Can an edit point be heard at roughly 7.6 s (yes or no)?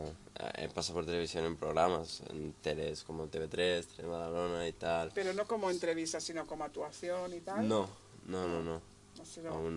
no